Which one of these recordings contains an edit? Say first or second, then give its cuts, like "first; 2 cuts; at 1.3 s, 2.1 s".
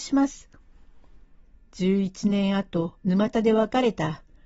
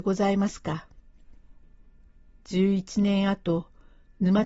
first; 2 cuts; at 1.5 s, 3.0 s